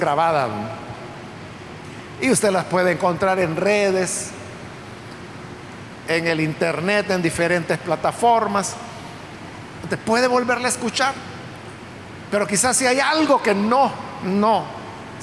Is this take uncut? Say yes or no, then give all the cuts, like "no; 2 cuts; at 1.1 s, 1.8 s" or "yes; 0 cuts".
yes; 0 cuts